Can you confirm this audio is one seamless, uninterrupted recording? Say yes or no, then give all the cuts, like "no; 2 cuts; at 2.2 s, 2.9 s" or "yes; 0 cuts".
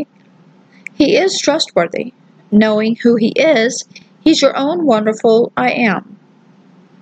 yes; 0 cuts